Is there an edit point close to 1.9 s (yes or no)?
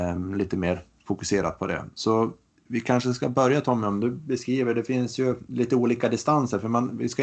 no